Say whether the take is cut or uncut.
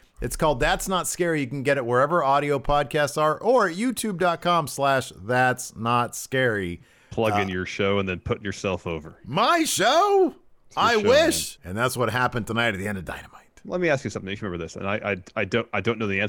cut